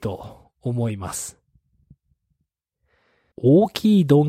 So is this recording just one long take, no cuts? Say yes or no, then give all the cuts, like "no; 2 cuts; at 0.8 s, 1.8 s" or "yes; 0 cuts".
no; 1 cut; at 3.3 s